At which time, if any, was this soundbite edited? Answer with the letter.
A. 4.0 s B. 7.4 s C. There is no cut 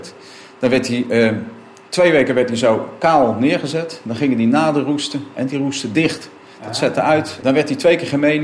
B